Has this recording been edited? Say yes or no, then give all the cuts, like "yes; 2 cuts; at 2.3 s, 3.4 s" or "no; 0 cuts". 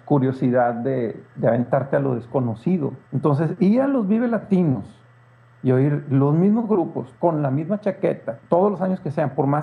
yes; 3 cuts; at 3.0 s, 7.2 s, 8.4 s